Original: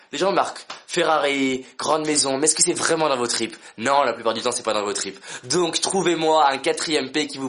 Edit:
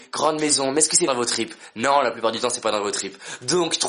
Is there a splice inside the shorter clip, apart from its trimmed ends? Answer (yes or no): yes